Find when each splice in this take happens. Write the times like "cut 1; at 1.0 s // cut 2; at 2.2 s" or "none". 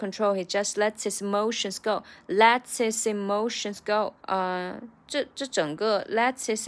cut 1; at 4.2 s